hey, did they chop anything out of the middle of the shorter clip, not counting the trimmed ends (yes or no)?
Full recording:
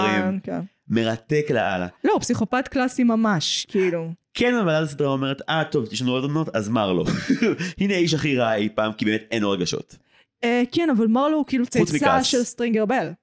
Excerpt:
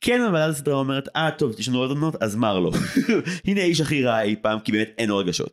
no